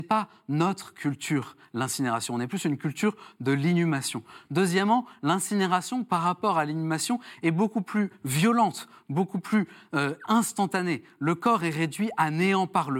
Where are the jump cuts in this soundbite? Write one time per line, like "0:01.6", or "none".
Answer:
none